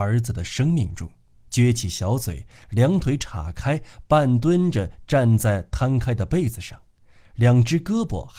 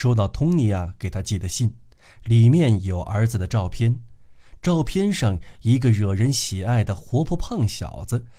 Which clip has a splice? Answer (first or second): first